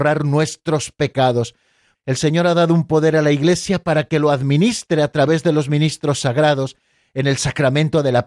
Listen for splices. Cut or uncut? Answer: cut